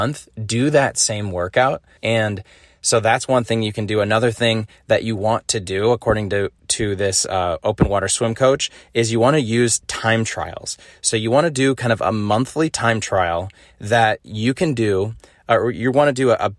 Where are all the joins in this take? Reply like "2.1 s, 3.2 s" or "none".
2.0 s